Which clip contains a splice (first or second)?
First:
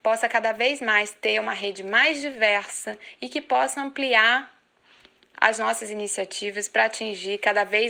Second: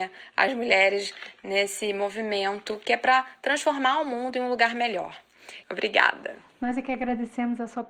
second